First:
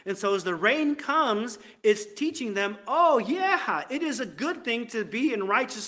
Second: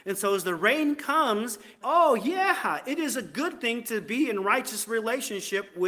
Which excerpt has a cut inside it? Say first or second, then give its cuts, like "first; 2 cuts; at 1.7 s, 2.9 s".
second; 1 cut; at 1.8 s